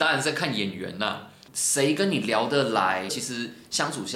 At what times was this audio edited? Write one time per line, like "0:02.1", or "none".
0:01.5
0:03.1

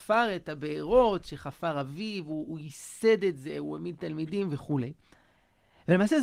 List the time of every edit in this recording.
none

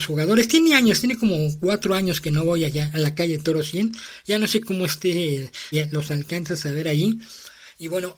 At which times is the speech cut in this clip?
0:05.7

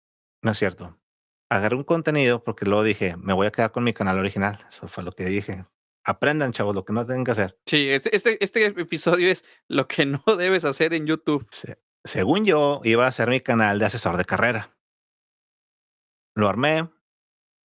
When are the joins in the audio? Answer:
none

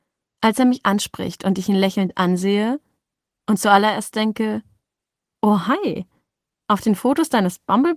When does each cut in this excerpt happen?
none

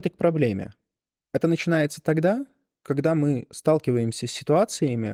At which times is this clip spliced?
0:01.2

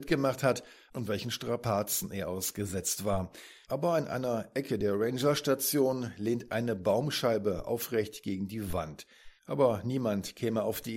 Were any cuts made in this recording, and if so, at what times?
0:09.4

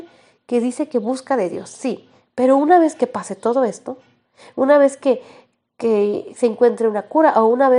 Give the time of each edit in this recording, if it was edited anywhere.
none

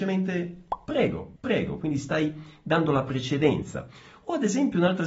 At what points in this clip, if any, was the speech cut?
0:01.4

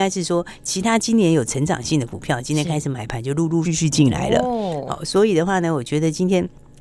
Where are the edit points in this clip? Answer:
0:03.6

